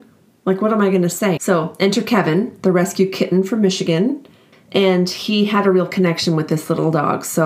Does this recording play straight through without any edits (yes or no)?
no